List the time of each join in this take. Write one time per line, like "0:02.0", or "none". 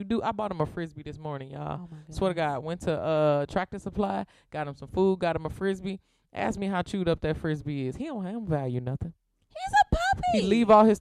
none